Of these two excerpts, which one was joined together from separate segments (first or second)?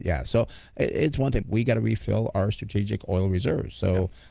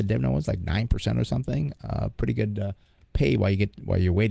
first